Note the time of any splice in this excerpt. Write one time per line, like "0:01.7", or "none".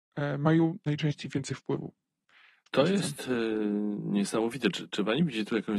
0:02.7

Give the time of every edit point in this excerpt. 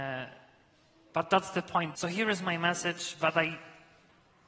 0:01.9

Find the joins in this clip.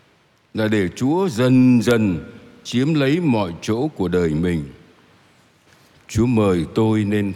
none

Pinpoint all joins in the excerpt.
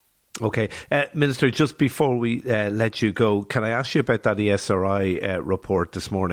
none

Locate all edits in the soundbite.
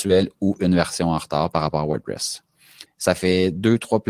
0:02.9

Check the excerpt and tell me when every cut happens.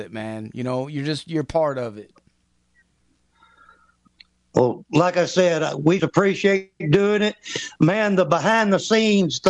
0:06.0

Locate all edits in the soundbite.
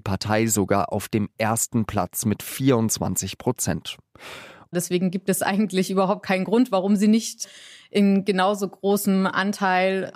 0:04.7

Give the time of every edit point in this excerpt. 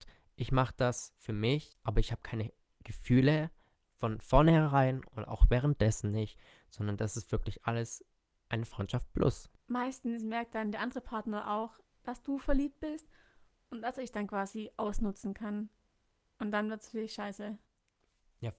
0:01.8

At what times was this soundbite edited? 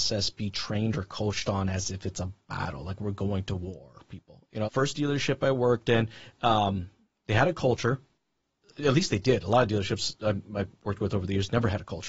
0:04.6

